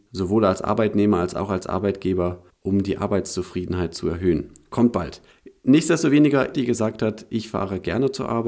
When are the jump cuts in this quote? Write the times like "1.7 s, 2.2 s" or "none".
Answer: 6.5 s